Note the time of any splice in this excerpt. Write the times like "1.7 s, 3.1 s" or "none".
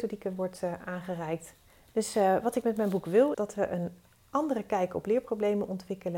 1.9 s, 3.3 s